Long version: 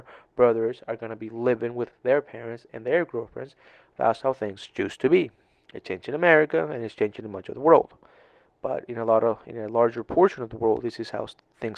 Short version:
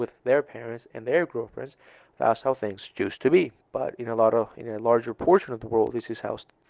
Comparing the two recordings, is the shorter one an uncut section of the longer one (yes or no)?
no